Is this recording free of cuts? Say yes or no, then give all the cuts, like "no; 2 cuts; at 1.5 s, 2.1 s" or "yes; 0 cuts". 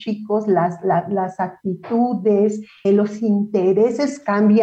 no; 1 cut; at 2.8 s